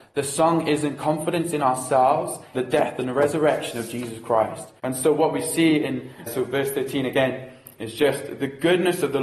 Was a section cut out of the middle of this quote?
yes; 3 cuts; at 2.5 s, 4.8 s, 6.3 s

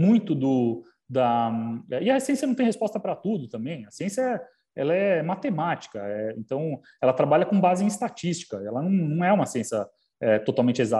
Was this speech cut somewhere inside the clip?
no; 0 cuts

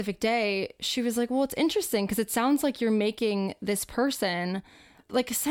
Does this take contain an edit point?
no; 0 cuts

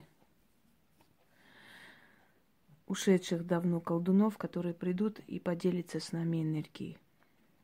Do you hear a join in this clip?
no; 0 cuts

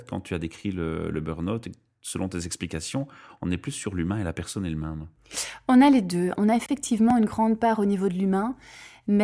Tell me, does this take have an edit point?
no; 0 cuts

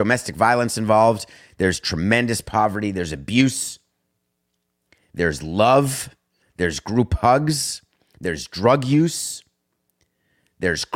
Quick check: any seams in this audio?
no; 0 cuts

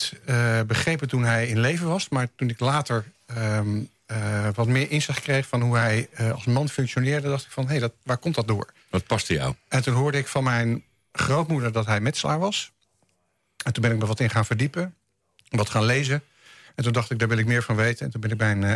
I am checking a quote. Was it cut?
no; 0 cuts

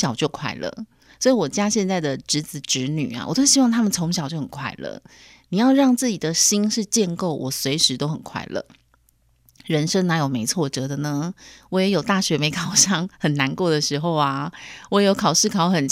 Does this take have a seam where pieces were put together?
no; 0 cuts

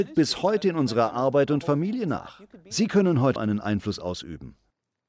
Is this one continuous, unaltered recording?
no; 1 cut; at 3.4 s

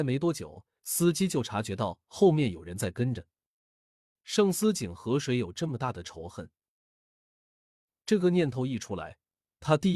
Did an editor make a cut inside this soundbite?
yes; 2 cuts; at 4.1 s, 7.9 s

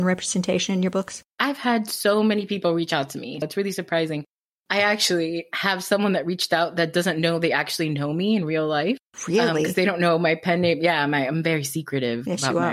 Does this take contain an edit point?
yes; 2 cuts; at 1.3 s, 3.4 s

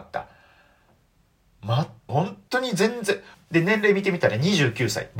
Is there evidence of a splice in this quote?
yes; 2 cuts; at 2.1 s, 3.3 s

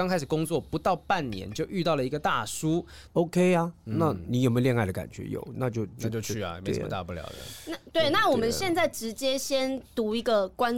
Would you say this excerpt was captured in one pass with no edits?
no; 1 cut; at 3.1 s

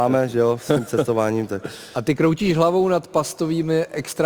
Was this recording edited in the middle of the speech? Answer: no; 0 cuts

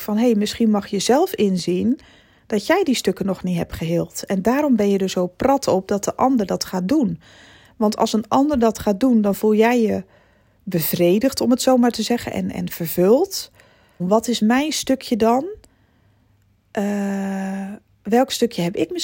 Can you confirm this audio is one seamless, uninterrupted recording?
no; 1 cut; at 14.0 s

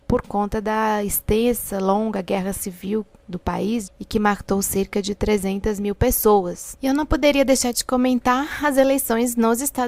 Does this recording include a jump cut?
yes; 2 cuts; at 3.9 s, 6.7 s

